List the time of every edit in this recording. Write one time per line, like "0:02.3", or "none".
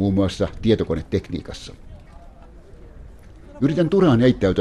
none